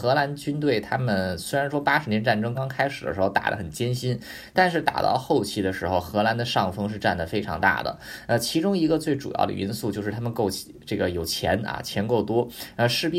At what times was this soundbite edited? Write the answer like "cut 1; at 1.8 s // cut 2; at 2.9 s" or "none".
cut 1; at 2.5 s